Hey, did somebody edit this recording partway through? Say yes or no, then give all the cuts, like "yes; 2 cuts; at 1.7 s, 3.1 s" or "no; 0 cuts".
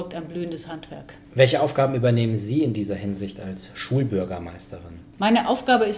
no; 0 cuts